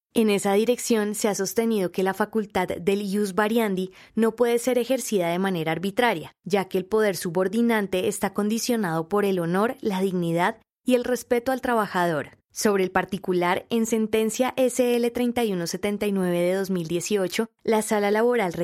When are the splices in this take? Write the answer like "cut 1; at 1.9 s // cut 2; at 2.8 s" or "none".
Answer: cut 1; at 12.4 s